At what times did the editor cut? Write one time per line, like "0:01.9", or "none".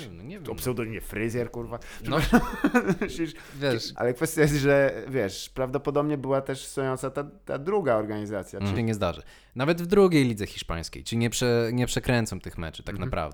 0:03.9
0:08.8